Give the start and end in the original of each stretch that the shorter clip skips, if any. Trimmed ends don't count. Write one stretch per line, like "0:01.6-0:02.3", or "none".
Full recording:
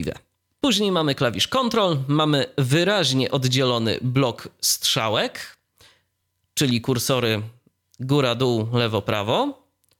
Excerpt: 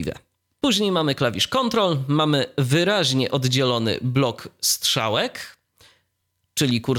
none